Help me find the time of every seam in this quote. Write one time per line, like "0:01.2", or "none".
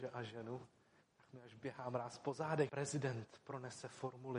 0:02.7